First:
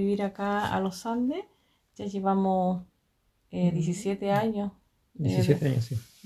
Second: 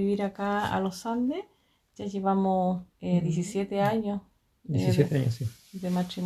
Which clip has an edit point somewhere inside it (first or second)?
second